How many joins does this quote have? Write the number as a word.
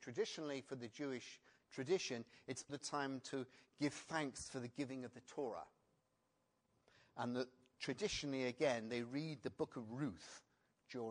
one